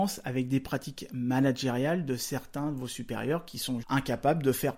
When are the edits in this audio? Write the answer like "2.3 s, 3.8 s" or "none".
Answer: 3.8 s